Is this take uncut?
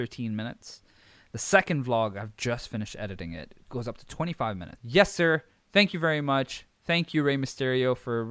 no; 1 cut; at 4.8 s

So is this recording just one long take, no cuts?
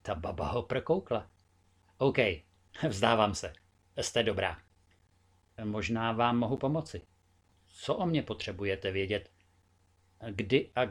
yes; 0 cuts

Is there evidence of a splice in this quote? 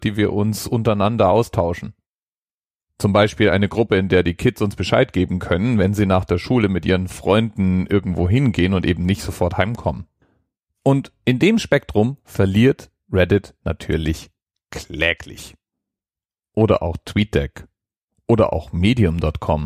no; 0 cuts

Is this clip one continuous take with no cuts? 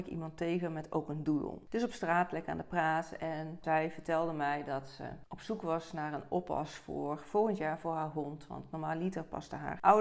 yes; 0 cuts

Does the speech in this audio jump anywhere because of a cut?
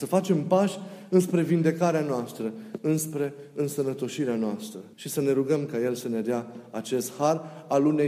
yes; 2 cuts; at 2.8 s, 4.9 s

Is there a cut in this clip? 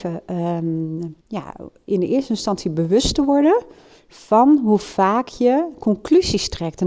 yes; 1 cut; at 1.2 s

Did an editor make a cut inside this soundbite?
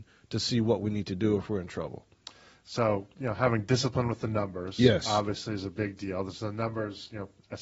no; 0 cuts

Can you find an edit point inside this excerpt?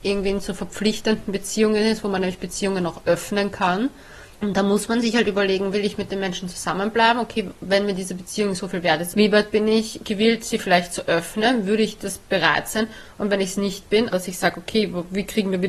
yes; 3 cuts; at 4.3 s, 9.1 s, 14.1 s

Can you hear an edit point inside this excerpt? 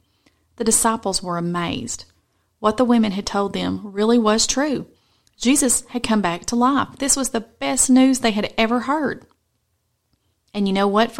no; 0 cuts

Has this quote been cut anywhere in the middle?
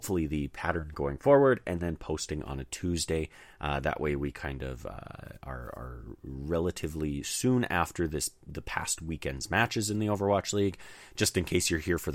no; 0 cuts

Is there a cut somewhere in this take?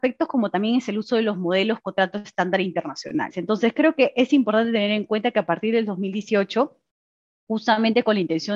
yes; 1 cut; at 3.3 s

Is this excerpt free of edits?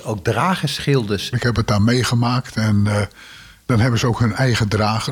no; 1 cut; at 1.3 s

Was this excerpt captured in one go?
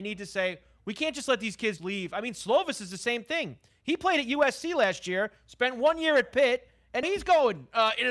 no; 2 cuts; at 1.8 s, 7.0 s

